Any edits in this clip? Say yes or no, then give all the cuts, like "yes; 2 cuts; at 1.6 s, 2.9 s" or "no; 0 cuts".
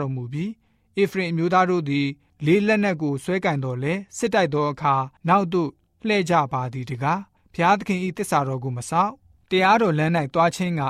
yes; 1 cut; at 5.2 s